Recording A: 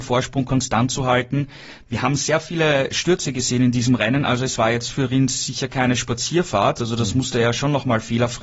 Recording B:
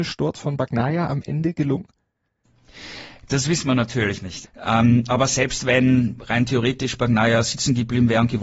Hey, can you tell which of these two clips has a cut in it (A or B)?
B